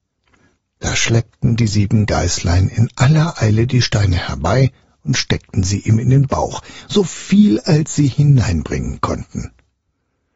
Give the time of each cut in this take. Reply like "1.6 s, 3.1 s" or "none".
none